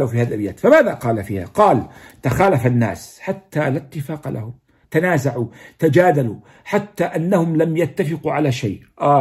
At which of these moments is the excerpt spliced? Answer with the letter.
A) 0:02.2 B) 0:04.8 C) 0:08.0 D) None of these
B